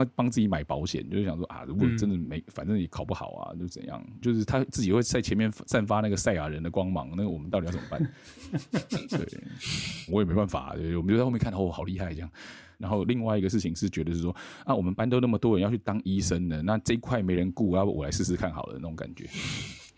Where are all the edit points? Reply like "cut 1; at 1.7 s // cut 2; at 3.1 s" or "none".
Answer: cut 1; at 4.2 s // cut 2; at 10.1 s // cut 3; at 12.8 s